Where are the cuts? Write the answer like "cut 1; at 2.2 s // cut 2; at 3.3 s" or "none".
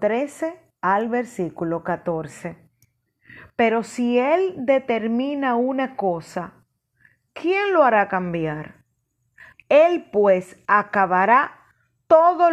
cut 1; at 9.5 s